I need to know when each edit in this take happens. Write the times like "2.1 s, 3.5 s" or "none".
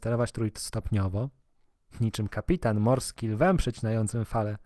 none